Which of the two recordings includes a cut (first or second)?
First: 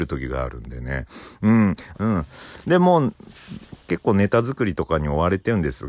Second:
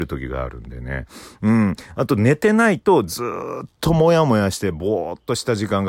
first